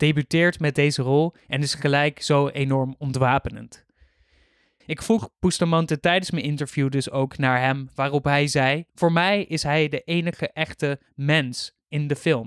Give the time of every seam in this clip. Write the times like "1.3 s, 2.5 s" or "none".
4.8 s, 8.9 s